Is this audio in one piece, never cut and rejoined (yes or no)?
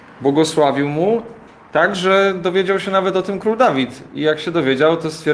yes